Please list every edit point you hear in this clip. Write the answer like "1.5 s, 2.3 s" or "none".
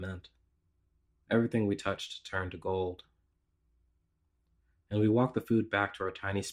1.2 s